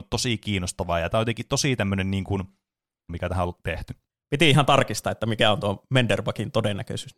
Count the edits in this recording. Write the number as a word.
one